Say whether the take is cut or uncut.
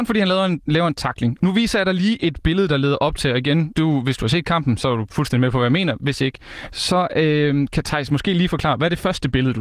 cut